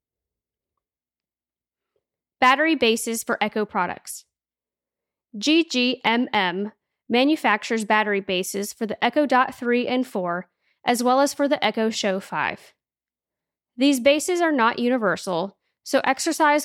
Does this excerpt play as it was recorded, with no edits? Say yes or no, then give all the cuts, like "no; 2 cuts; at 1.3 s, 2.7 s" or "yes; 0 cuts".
yes; 0 cuts